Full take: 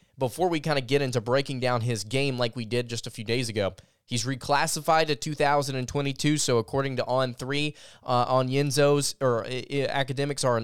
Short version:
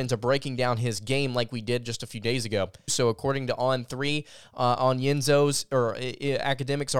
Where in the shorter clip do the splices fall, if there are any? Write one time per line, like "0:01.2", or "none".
0:02.9